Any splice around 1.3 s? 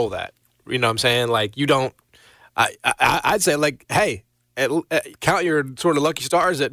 no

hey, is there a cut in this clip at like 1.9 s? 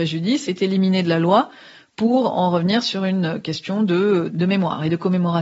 no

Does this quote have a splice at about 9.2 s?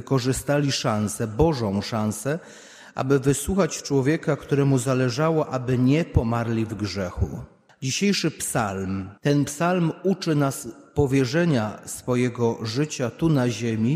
yes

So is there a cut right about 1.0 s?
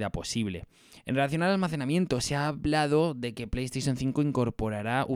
yes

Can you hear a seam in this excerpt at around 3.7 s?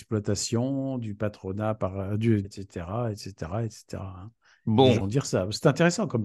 no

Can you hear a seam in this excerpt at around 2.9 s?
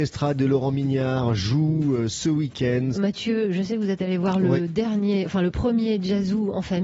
yes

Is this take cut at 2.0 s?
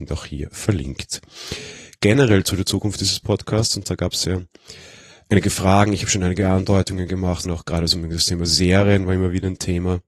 no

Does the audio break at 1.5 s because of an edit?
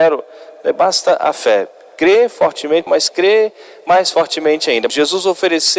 no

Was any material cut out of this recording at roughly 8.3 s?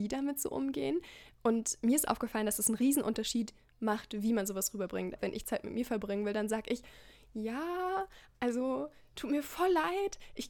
no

